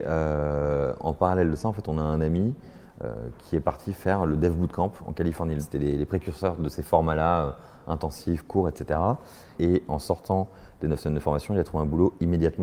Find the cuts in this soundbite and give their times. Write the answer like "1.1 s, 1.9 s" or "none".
none